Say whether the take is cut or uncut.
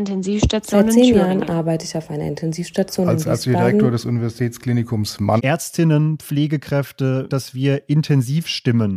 cut